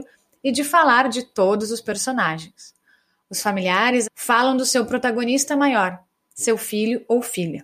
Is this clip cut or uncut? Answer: cut